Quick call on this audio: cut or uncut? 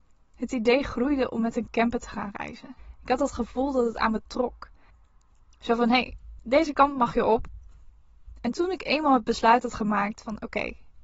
uncut